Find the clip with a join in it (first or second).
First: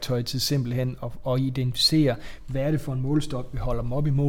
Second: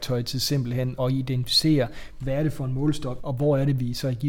second